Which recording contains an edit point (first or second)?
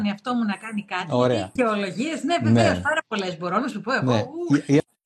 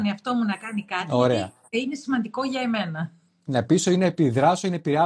first